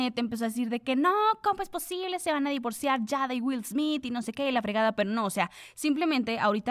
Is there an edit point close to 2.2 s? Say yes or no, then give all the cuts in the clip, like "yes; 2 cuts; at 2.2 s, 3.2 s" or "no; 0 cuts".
no; 0 cuts